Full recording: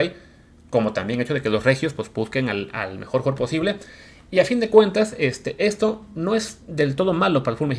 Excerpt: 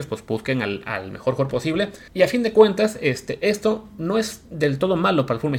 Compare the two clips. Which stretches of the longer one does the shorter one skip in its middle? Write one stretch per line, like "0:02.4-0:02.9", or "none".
0:03.9-0:04.2